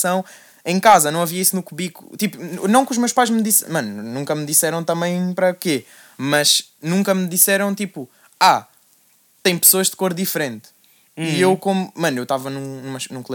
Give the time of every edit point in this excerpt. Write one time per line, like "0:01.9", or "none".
none